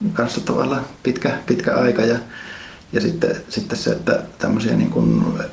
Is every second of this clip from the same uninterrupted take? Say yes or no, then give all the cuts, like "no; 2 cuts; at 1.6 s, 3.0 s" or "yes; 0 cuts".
no; 1 cut; at 1.5 s